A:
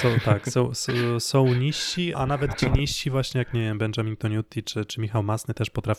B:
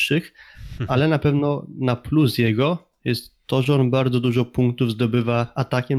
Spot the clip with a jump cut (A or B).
A